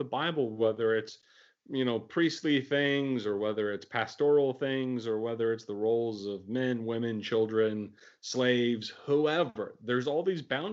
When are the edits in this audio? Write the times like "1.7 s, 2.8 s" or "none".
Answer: none

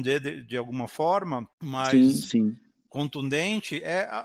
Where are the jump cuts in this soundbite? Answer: 1.5 s

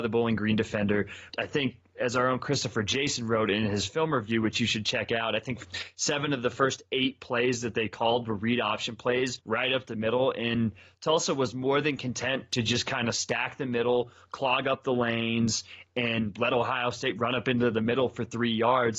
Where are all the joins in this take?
1.3 s

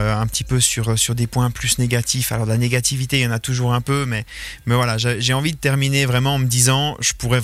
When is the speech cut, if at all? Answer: none

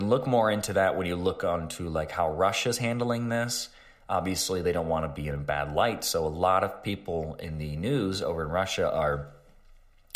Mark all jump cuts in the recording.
none

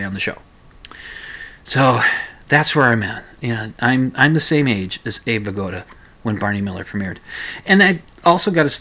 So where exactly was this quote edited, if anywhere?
none

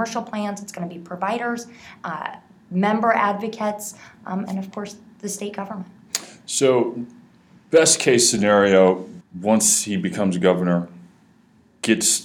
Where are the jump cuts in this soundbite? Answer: 9.2 s

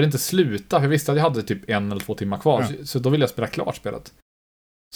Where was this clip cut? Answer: none

